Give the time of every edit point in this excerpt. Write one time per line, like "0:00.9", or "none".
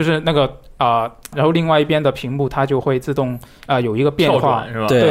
0:01.3